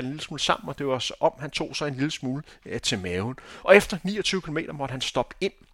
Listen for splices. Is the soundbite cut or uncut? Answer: uncut